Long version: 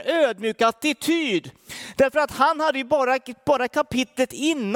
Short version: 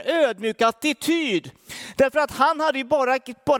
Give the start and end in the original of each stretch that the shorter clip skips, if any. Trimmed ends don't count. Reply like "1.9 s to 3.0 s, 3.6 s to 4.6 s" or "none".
none